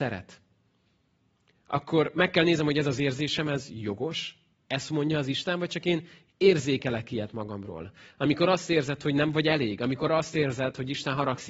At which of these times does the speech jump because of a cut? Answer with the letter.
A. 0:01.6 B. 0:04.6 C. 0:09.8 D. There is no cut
B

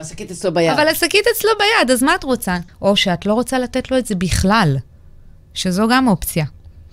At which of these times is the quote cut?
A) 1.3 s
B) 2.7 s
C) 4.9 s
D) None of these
B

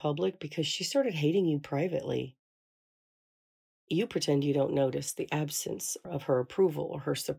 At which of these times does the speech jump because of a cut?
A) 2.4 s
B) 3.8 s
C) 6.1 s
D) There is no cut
D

